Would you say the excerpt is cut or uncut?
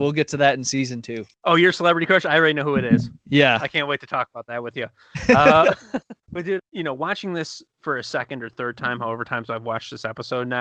cut